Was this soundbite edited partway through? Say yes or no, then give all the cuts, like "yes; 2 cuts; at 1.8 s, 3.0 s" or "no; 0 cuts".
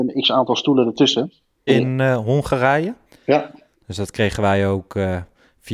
yes; 2 cuts; at 1.7 s, 3.1 s